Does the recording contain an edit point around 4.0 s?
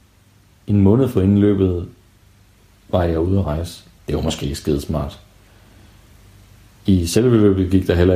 yes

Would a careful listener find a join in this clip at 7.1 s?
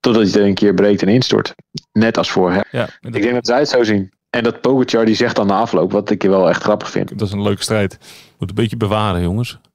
yes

